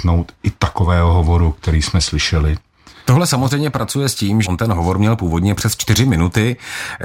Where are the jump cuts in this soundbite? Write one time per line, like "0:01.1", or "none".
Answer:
0:03.1
0:04.4